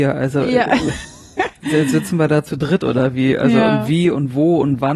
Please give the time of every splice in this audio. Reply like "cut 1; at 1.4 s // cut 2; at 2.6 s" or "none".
none

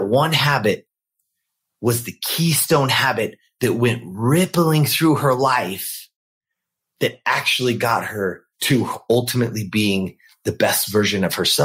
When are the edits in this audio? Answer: cut 1; at 8.5 s

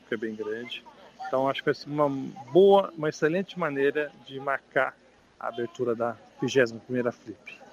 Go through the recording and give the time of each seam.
cut 1; at 1.8 s

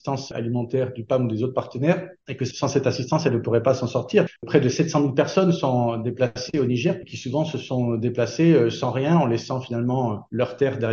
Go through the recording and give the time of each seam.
cut 1; at 7.0 s

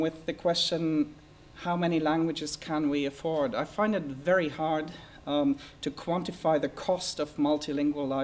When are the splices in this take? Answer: none

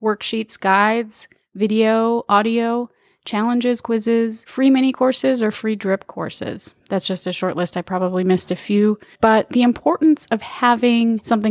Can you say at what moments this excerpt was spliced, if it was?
none

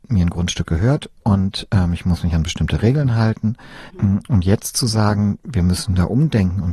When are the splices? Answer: cut 1; at 1.1 s // cut 2; at 3.9 s

